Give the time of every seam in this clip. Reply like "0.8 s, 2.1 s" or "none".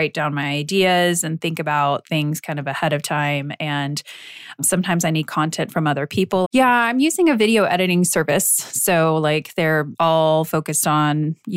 6.4 s